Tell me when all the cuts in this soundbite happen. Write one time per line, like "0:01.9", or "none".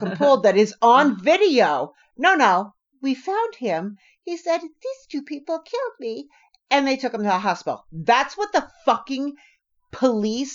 none

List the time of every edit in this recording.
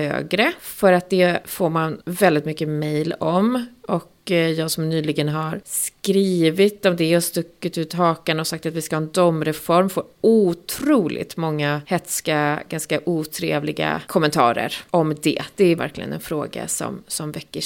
0:15.8

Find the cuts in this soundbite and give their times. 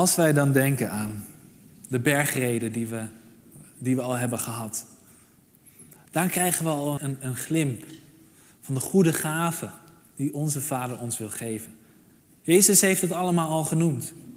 0:07.0

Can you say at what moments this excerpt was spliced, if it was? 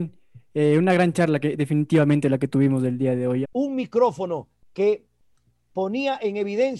0:03.4

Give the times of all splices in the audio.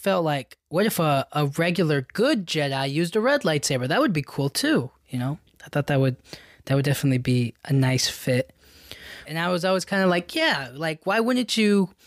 0:09.2

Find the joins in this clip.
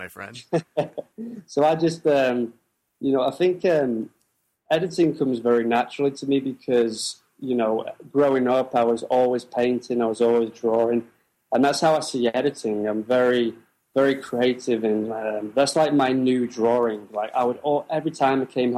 none

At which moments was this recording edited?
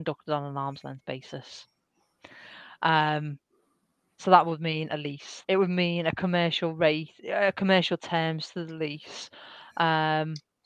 0:05.4

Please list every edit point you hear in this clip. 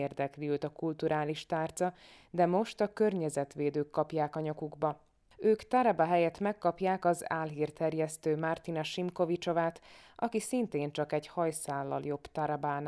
0:05.3

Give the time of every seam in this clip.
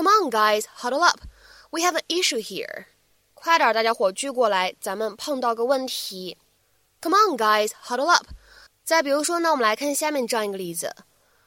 0:08.7

